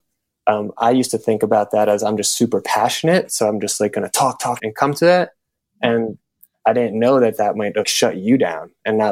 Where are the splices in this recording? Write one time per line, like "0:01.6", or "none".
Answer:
0:04.6
0:07.8